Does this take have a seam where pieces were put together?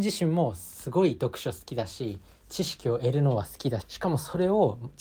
yes; 1 cut; at 3.8 s

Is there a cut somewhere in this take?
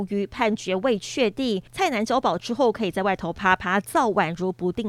no; 0 cuts

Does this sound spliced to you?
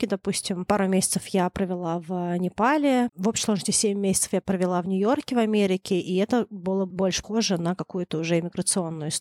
yes; 2 cuts; at 3.1 s, 7.2 s

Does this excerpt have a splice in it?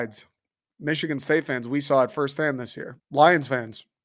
yes; 1 cut; at 3.0 s

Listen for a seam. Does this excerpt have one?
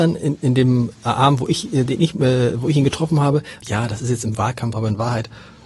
yes; 2 cuts; at 3.6 s, 4.7 s

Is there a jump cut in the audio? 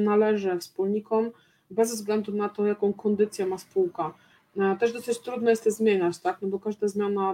no; 0 cuts

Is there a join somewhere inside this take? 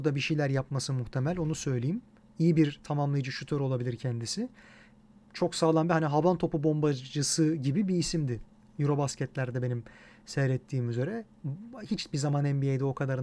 no; 0 cuts

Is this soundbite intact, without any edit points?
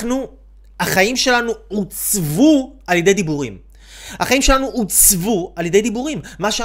yes; 0 cuts

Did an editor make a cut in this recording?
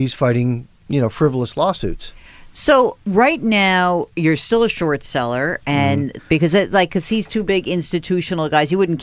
yes; 1 cut; at 6.2 s

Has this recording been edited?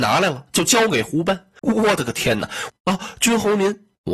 yes; 2 cuts; at 1.6 s, 2.7 s

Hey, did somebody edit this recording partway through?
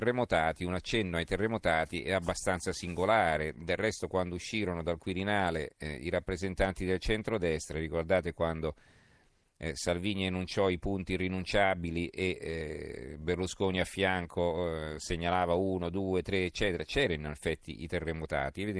no; 0 cuts

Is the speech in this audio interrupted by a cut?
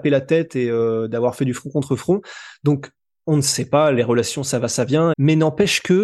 yes; 1 cut; at 5.1 s

